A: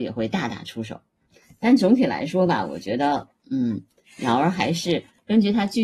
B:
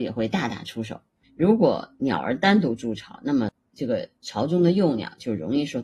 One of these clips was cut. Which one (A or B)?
B